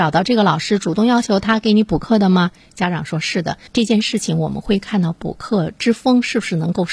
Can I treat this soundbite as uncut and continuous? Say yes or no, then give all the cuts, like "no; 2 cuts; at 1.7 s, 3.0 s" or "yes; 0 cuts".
no; 1 cut; at 3.7 s